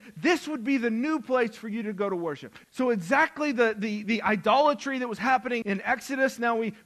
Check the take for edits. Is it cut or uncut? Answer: cut